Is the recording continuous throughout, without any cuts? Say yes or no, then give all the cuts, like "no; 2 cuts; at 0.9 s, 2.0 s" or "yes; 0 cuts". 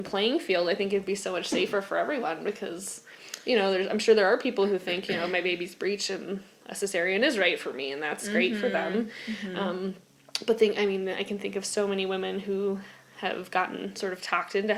yes; 0 cuts